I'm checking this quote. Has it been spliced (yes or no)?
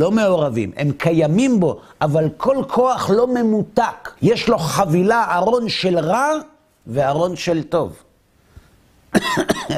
yes